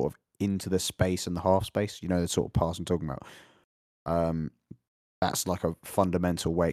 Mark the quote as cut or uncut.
uncut